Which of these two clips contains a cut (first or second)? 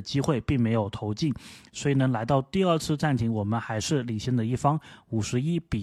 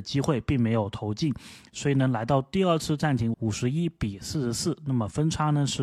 second